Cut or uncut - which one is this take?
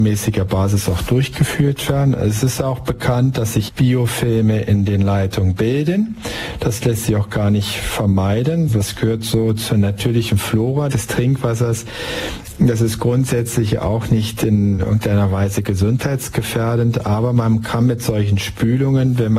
uncut